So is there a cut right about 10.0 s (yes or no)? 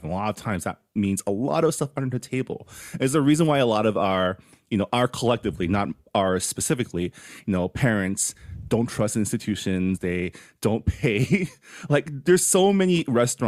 yes